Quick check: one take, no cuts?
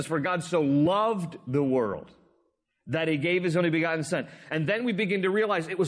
yes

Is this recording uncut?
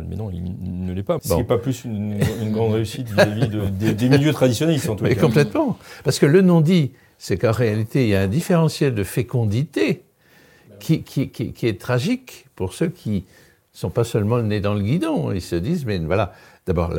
no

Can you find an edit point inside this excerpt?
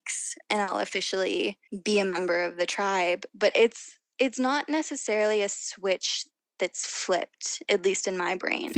no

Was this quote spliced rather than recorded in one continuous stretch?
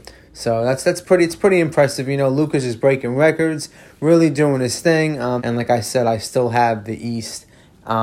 yes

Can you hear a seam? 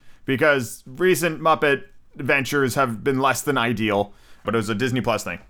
yes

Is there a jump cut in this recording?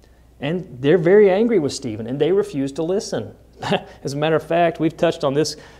no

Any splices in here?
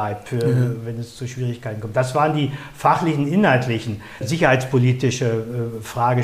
yes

